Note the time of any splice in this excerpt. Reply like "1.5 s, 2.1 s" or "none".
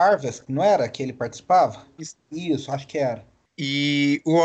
2.0 s, 3.5 s